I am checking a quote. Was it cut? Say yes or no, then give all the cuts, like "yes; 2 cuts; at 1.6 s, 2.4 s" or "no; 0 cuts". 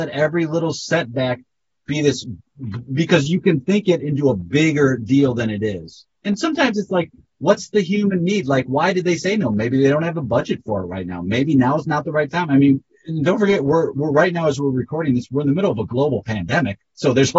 no; 0 cuts